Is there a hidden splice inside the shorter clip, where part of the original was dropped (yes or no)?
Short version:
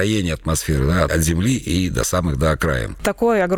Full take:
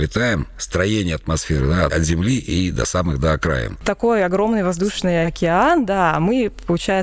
no